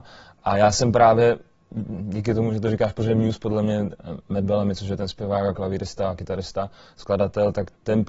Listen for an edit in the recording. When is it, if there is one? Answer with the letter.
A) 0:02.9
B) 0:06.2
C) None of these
C